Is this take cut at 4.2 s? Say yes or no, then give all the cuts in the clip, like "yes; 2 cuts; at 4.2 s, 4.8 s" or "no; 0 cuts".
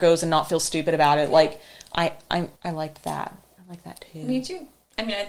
no; 1 cut; at 2.6 s